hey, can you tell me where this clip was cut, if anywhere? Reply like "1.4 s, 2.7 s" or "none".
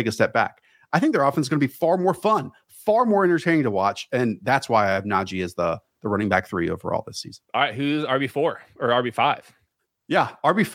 7.4 s